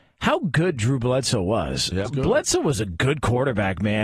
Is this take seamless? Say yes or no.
no